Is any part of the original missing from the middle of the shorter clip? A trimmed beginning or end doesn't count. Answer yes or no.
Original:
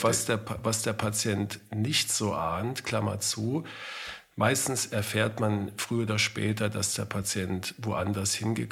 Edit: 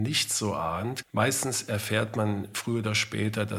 yes